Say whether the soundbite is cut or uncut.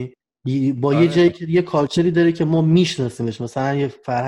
uncut